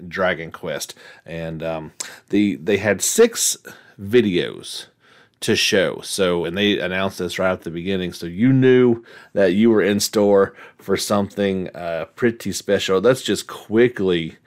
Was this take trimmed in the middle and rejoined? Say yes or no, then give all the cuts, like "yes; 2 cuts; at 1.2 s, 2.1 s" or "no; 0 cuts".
no; 0 cuts